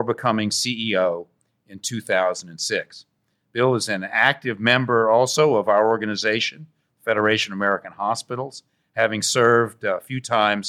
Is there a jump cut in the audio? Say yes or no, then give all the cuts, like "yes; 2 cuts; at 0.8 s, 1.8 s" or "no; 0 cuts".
no; 0 cuts